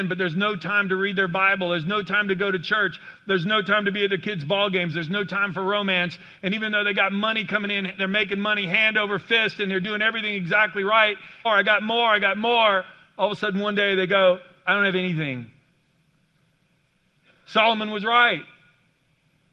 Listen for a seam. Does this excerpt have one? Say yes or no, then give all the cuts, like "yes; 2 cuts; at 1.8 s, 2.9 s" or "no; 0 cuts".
yes; 1 cut; at 11.4 s